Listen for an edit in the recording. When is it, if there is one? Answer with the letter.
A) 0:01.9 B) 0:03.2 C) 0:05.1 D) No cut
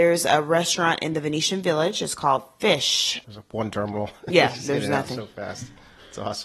B